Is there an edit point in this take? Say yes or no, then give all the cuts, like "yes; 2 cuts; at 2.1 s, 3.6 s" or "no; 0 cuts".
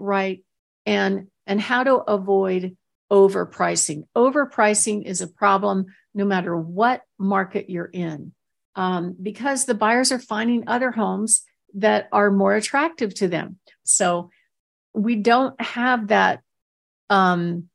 yes; 1 cut; at 13.8 s